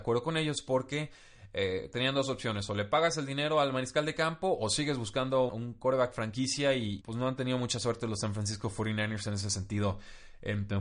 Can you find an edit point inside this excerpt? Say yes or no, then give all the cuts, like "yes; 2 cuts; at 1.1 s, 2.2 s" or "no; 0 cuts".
yes; 2 cuts; at 5.5 s, 7.0 s